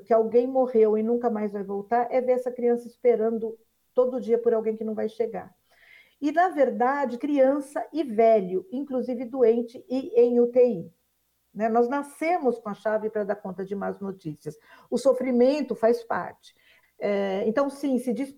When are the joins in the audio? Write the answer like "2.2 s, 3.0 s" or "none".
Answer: 7.2 s, 16.8 s